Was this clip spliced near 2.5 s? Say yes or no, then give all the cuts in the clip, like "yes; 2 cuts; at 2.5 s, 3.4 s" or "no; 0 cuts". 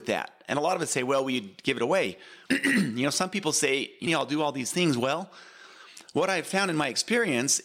yes; 2 cuts; at 2.5 s, 4.1 s